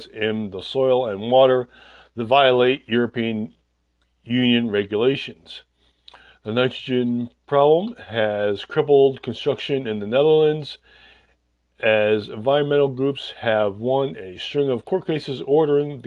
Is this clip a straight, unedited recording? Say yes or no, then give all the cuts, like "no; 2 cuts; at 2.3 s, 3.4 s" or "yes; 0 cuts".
yes; 0 cuts